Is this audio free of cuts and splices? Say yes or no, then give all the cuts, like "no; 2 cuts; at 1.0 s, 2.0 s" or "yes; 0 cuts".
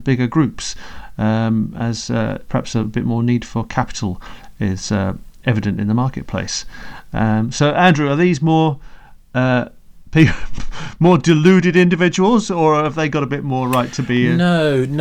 yes; 0 cuts